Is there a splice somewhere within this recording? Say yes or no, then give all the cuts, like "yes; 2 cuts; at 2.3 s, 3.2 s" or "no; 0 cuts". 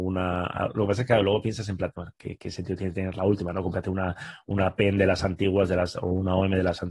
yes; 1 cut; at 2.1 s